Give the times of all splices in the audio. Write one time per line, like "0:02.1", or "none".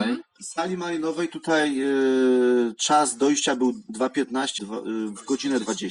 0:04.6